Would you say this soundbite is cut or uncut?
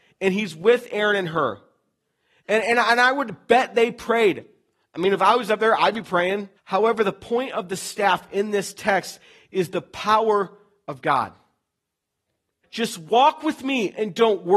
cut